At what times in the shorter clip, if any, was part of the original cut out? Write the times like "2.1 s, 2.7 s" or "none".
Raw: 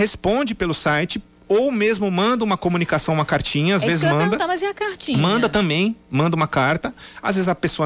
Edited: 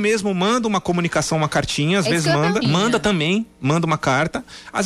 2.6 s